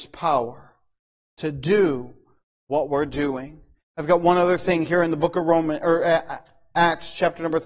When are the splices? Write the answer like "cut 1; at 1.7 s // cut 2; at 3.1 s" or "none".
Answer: none